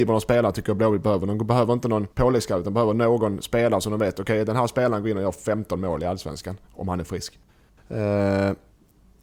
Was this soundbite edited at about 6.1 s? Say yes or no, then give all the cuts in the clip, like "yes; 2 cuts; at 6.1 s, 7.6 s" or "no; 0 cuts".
no; 2 cuts; at 2.1 s, 7.8 s